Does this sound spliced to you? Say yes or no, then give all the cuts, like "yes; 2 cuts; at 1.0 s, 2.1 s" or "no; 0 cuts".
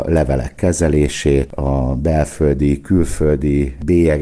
no; 0 cuts